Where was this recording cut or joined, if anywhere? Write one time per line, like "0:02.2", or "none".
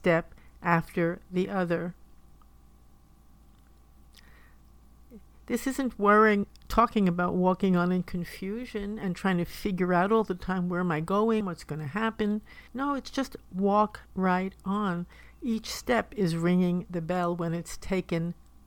0:11.4
0:12.7
0:14.1